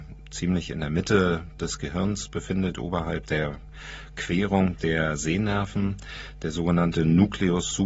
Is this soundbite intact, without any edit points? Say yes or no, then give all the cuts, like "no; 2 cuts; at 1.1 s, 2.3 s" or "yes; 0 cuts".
yes; 0 cuts